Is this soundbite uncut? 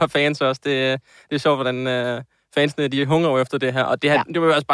yes; 0 cuts

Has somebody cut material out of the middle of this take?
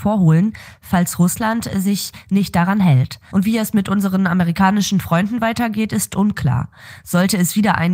yes; 1 cut; at 3.3 s

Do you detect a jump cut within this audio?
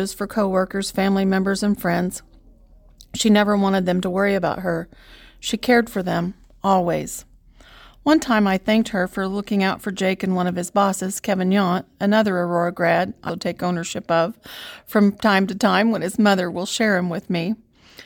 yes; 1 cut; at 13.3 s

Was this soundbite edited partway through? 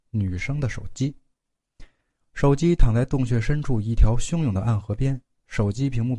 no; 0 cuts

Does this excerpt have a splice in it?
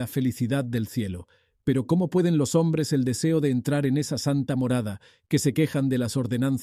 no; 0 cuts

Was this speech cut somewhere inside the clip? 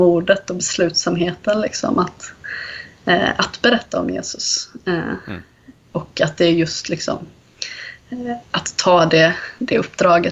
no; 0 cuts

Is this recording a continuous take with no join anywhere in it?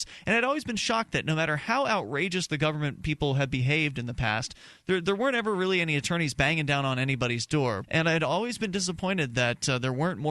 no; 1 cut; at 7.8 s

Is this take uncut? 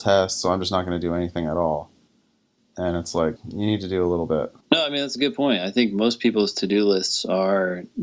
no; 2 cuts; at 3.4 s, 4.6 s

